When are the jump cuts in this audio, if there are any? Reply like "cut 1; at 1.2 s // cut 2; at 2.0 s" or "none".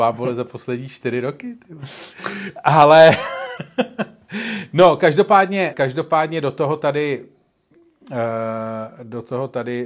cut 1; at 5.7 s